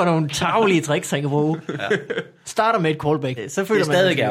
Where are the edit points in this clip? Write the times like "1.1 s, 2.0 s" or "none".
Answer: 3.4 s